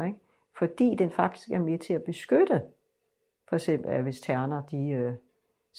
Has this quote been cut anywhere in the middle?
no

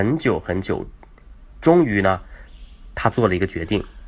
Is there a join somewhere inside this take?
no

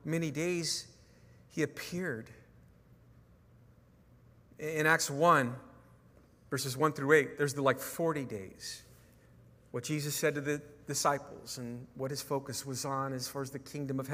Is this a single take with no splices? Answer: yes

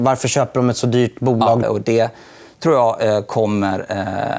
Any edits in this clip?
yes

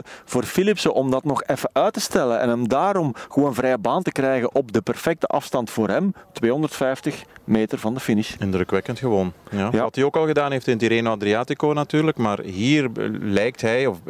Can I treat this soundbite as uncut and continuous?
yes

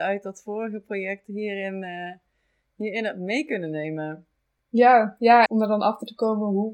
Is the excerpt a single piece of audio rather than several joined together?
no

